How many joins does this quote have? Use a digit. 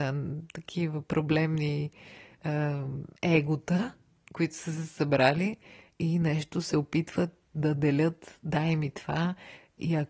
1